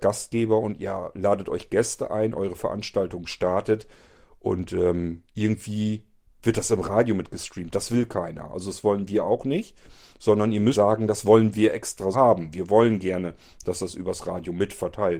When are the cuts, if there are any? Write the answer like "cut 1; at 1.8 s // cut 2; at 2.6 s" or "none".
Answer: cut 1; at 10.7 s // cut 2; at 12.1 s

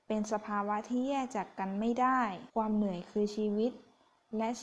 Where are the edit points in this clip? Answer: cut 1; at 2.5 s

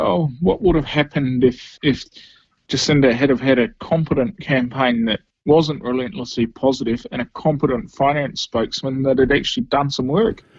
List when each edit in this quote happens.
cut 1; at 1.8 s

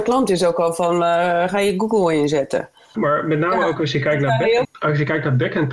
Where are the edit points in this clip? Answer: cut 1; at 2.9 s // cut 2; at 4.6 s

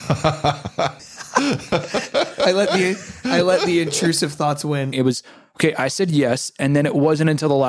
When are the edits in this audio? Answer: cut 1; at 1.0 s // cut 2; at 4.9 s

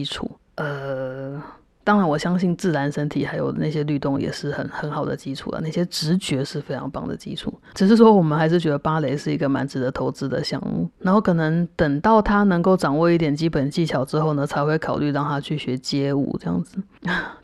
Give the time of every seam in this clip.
none

